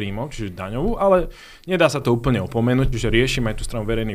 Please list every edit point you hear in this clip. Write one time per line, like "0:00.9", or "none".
0:02.9